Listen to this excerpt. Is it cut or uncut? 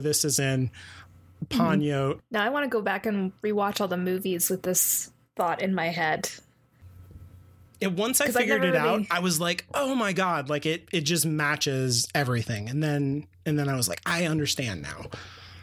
cut